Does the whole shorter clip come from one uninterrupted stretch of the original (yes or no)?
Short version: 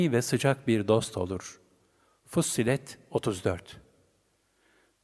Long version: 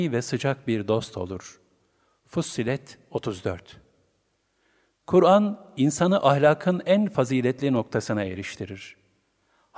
yes